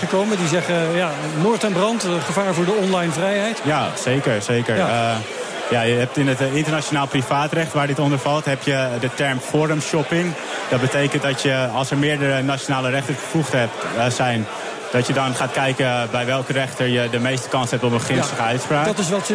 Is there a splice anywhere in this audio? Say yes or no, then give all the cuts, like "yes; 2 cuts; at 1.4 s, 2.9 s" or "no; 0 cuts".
yes; 1 cut; at 3.6 s